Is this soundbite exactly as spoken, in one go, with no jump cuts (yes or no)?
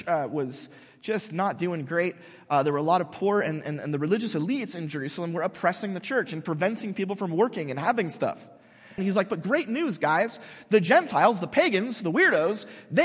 no